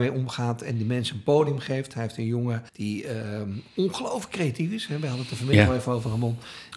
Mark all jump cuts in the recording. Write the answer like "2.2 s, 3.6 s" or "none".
2.7 s